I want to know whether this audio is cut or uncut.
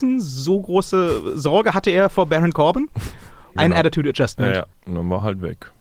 cut